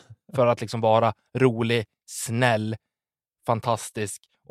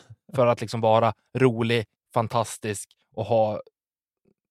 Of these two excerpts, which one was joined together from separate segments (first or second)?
second